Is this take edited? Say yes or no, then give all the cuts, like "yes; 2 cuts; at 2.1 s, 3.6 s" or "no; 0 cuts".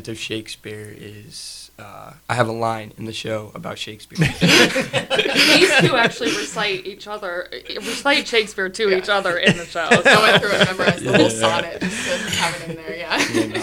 yes; 2 cuts; at 2.2 s, 4.2 s